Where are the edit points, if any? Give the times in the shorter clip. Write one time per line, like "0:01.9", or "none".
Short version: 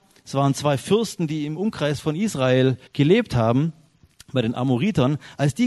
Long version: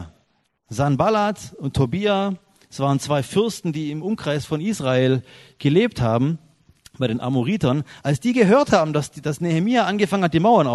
0:02.9